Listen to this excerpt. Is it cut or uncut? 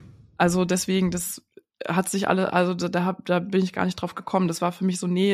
uncut